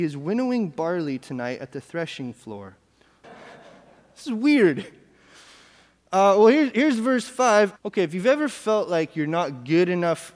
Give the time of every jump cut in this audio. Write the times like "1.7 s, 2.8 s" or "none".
3.2 s, 7.8 s

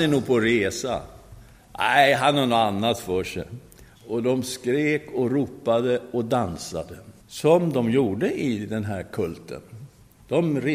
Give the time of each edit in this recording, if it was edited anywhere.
4.0 s, 7.2 s

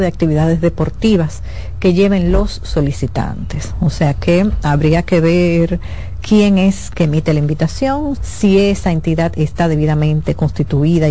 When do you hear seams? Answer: 8.2 s

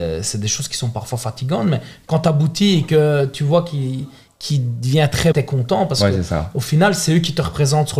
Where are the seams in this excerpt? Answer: 5.3 s

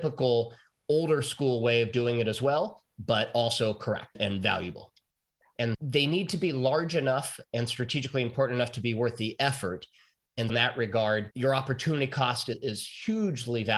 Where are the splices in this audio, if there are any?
5.6 s, 10.5 s

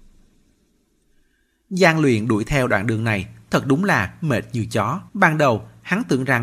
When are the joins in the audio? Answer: 5.1 s

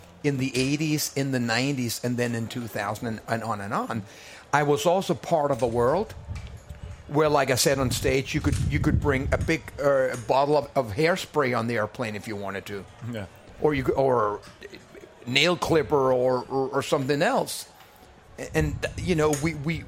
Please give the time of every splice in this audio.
none

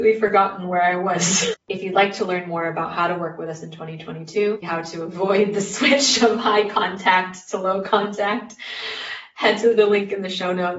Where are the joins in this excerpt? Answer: 1.5 s, 4.6 s

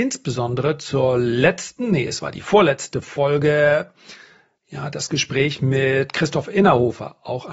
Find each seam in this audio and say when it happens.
none

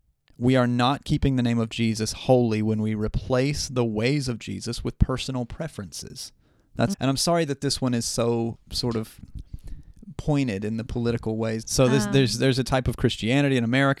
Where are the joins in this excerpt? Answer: 6.9 s, 11.6 s

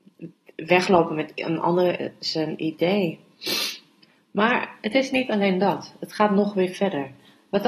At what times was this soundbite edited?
none

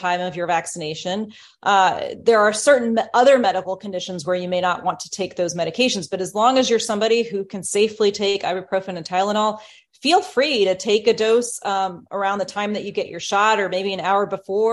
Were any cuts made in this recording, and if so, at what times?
none

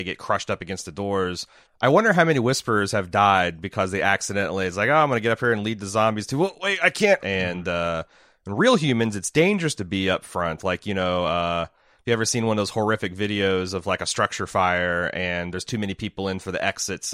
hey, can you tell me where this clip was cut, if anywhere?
1.6 s, 7.2 s

